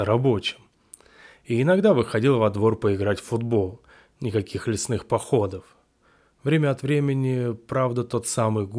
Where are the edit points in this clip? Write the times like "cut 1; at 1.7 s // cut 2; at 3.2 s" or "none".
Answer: none

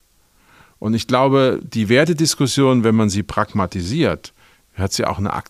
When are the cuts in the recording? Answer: none

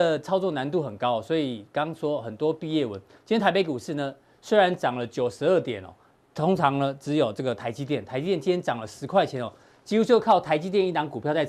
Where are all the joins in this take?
none

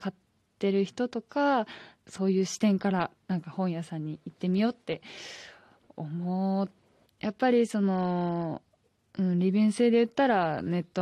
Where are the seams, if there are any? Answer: cut 1; at 7.1 s

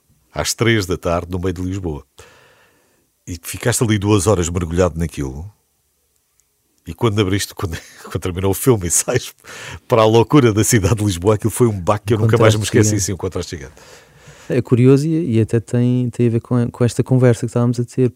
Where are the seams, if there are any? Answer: none

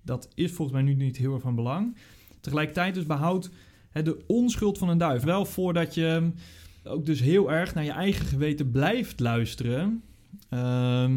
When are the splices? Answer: cut 1; at 5.2 s // cut 2; at 6.8 s

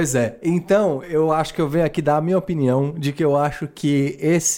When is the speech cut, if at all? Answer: cut 1; at 1.0 s

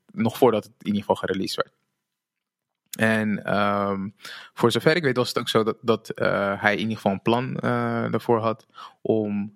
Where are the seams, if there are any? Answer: none

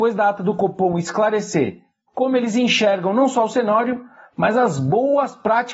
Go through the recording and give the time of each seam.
cut 1; at 2.1 s

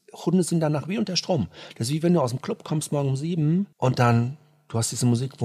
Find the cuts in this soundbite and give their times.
cut 1; at 3.7 s

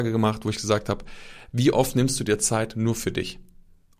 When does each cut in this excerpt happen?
none

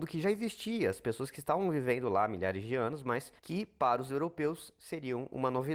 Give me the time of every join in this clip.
cut 1; at 3.4 s

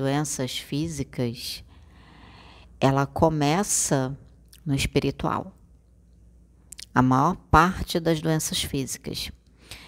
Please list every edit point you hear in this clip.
none

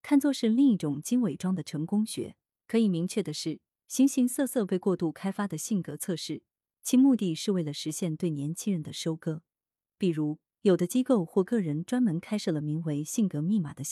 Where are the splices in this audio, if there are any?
none

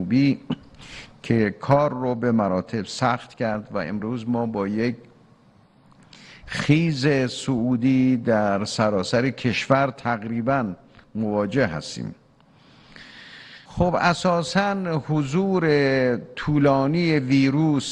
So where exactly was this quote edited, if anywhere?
cut 1; at 13.7 s

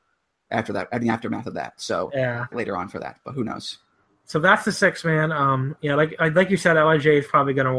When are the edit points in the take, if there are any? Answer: cut 1; at 2.5 s

